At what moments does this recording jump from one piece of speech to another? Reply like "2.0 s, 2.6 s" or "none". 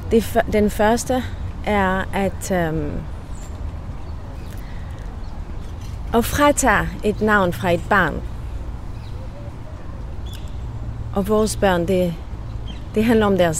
none